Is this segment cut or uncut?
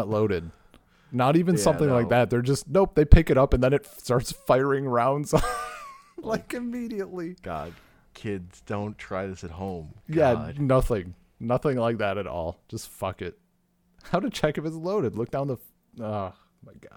uncut